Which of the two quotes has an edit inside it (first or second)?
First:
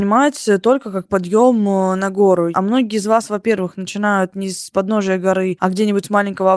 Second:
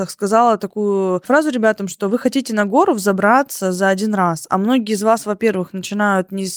first